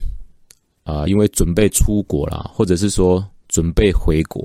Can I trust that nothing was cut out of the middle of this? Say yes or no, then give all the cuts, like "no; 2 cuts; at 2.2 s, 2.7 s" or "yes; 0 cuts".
yes; 0 cuts